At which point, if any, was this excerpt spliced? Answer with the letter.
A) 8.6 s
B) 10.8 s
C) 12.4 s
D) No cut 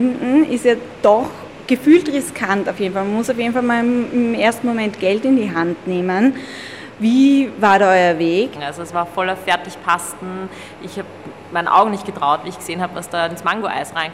A